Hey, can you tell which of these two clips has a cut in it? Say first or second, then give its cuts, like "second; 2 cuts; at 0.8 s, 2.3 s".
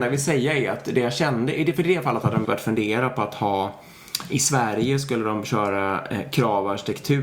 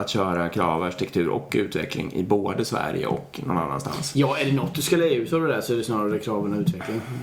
first; 1 cut; at 2.4 s